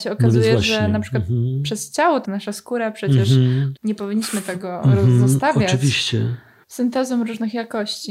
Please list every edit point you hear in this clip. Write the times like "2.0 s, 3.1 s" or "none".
2.2 s, 3.8 s, 6.6 s